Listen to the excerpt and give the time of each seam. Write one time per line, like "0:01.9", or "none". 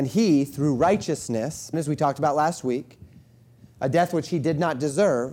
0:01.7